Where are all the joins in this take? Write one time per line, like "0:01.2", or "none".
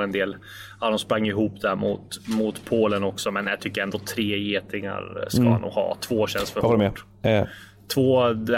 none